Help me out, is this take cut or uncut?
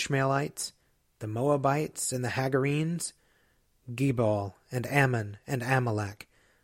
uncut